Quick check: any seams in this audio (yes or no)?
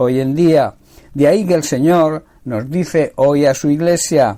yes